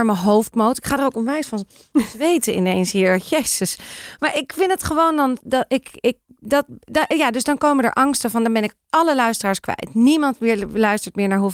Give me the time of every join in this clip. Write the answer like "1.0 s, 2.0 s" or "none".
none